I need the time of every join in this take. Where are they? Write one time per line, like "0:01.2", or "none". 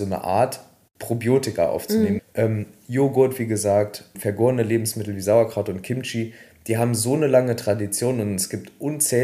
0:02.2
0:04.1